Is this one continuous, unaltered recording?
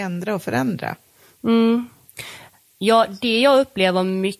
yes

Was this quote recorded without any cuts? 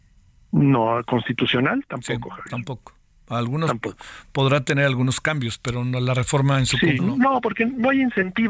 no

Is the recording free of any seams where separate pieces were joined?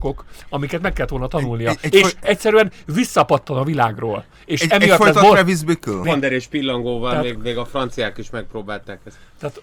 no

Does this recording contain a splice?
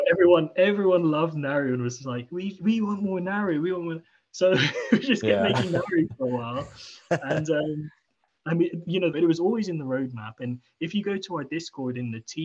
yes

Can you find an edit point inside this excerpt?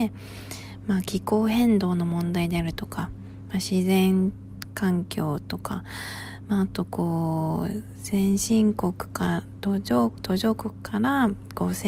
no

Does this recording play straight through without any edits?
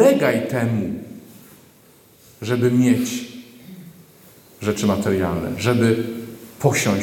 yes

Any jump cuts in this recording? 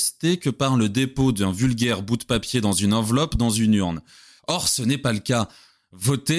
yes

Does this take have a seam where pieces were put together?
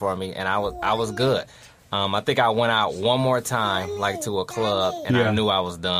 no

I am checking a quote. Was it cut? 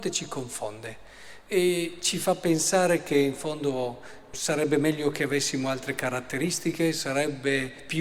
yes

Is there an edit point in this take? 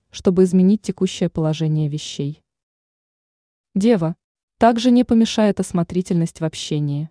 yes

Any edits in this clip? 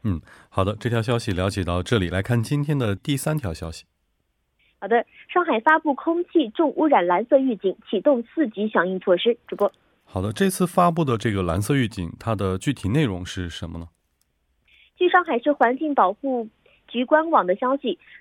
yes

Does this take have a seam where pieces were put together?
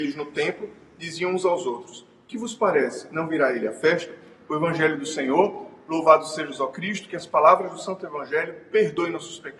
no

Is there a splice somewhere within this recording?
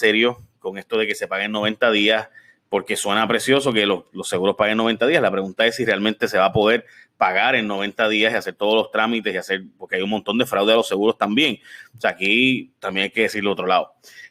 no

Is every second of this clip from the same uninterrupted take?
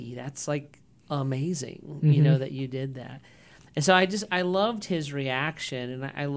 yes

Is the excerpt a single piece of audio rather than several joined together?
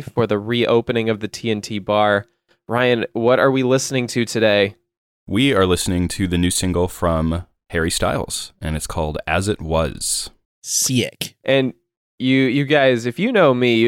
no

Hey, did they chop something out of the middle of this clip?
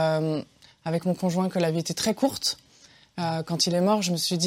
no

